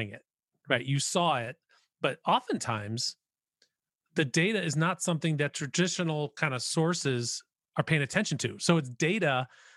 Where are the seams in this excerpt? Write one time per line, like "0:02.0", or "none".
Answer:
none